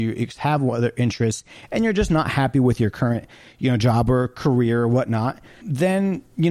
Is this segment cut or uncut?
cut